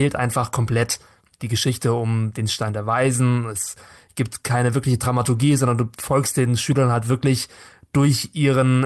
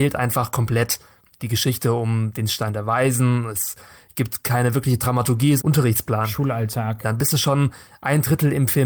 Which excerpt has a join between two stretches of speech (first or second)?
second